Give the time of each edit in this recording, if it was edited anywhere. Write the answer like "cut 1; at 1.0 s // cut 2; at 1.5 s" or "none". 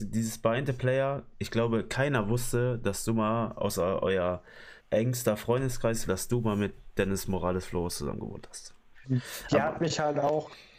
cut 1; at 4.8 s // cut 2; at 6.1 s // cut 3; at 9.0 s